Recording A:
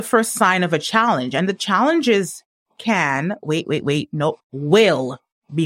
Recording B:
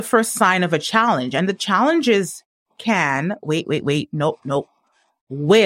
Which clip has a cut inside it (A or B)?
A